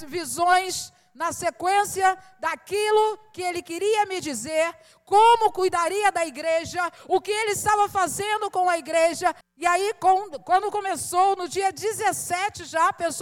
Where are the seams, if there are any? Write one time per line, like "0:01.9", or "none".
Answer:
0:09.4